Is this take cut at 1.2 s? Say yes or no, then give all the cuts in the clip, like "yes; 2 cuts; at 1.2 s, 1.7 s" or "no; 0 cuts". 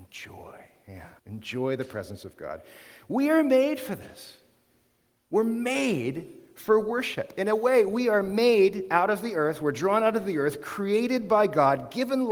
yes; 1 cut; at 1.2 s